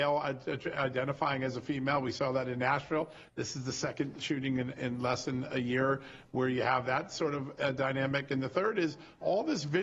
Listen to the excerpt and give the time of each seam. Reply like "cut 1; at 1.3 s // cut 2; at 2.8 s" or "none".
none